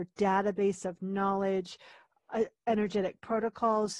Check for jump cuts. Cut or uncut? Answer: uncut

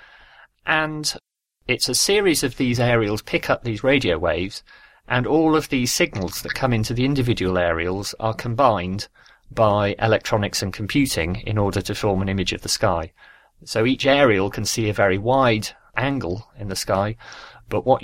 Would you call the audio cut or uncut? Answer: uncut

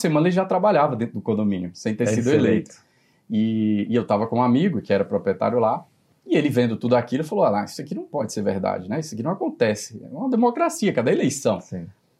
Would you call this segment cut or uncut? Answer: uncut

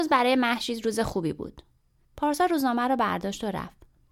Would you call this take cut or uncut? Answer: cut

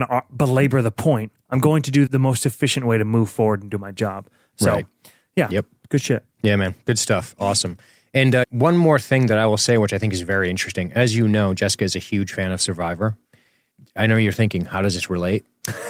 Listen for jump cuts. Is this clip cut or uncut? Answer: cut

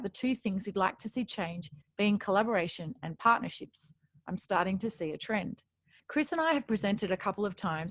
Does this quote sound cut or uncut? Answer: cut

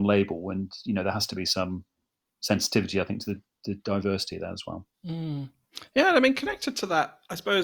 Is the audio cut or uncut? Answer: uncut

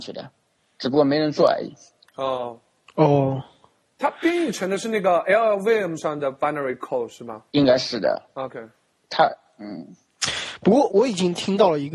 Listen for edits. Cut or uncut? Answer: cut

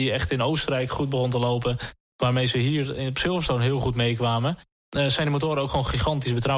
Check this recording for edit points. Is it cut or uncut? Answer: uncut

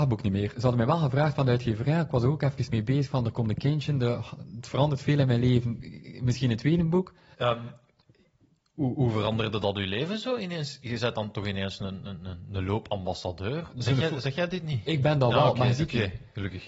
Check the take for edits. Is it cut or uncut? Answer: cut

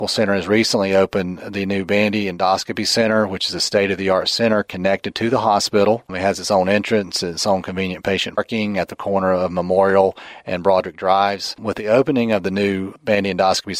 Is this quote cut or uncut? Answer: cut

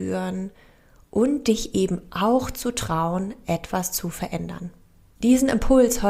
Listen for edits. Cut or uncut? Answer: cut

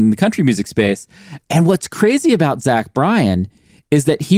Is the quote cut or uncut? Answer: cut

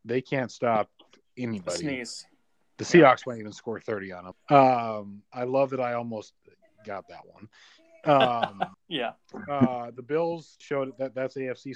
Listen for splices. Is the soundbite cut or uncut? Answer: cut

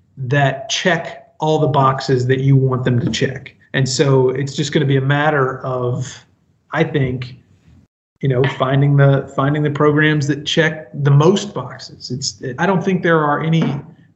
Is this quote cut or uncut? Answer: cut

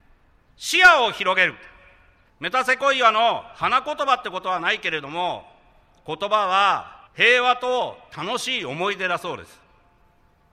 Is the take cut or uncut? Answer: cut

